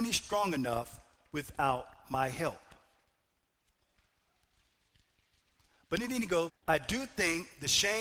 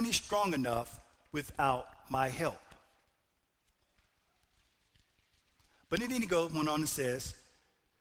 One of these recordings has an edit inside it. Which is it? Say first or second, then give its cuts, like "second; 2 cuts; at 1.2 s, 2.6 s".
first; 1 cut; at 6.5 s